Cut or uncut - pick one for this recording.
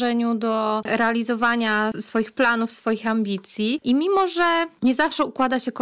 uncut